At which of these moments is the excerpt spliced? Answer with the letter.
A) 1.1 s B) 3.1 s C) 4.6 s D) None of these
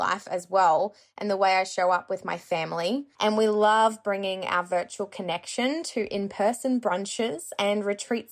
B